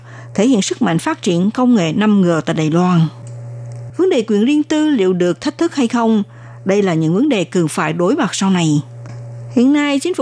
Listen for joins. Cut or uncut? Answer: cut